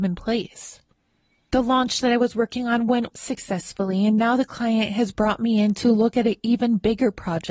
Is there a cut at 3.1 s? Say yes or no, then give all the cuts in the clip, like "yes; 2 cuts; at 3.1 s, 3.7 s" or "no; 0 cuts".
yes; 1 cut; at 3.1 s